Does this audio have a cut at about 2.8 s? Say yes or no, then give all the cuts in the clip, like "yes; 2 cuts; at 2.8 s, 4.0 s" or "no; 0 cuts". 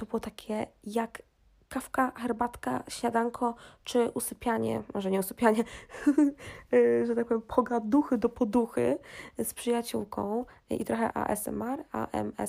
no; 1 cut; at 11.1 s